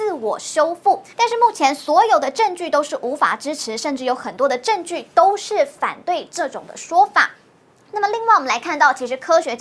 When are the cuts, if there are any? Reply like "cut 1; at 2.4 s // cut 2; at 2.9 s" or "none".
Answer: cut 1; at 1.1 s